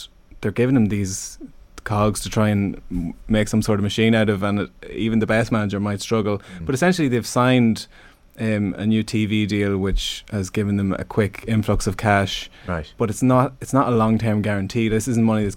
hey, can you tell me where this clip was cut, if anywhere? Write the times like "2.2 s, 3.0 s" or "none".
none